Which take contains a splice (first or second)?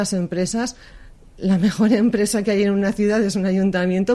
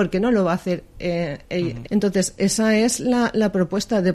second